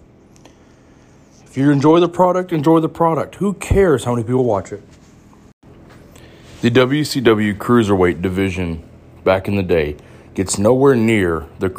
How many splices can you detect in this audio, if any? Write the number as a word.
one